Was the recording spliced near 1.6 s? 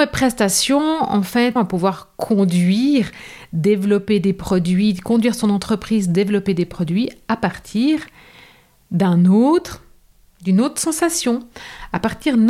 yes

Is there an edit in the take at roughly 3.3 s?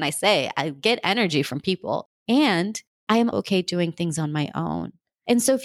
yes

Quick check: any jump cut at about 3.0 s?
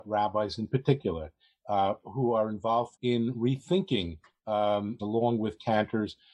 yes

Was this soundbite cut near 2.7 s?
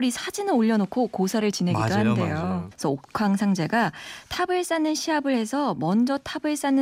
yes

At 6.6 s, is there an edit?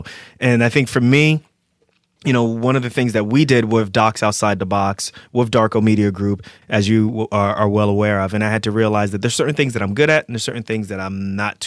yes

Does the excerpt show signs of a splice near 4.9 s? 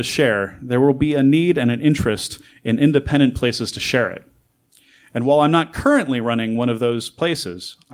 no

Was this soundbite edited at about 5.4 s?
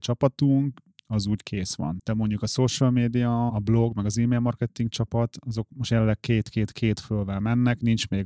no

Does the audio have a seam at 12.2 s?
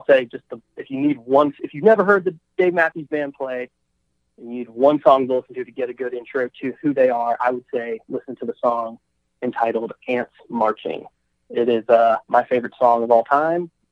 yes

